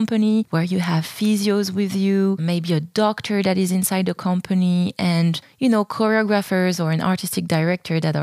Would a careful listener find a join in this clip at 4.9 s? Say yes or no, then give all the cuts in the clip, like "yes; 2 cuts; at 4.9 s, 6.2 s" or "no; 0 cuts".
no; 1 cut; at 2.4 s